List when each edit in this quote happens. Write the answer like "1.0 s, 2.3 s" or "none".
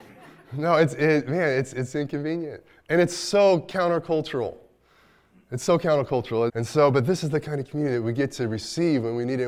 6.5 s